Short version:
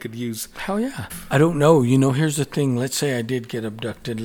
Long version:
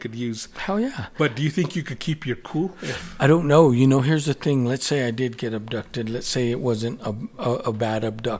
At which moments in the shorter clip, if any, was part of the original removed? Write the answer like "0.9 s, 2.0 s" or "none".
1.1 s